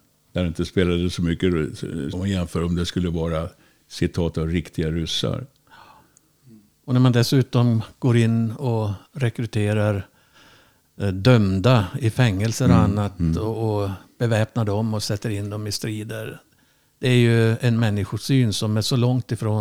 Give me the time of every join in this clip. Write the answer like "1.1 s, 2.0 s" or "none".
2.1 s